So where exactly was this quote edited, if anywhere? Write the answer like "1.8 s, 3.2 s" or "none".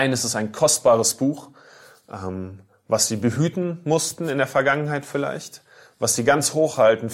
none